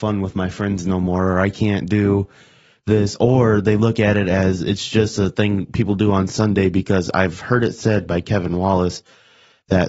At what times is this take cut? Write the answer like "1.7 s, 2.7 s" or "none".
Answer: none